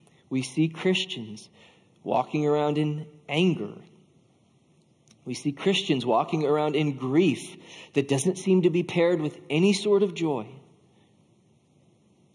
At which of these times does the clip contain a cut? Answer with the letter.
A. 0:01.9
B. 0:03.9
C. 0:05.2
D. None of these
D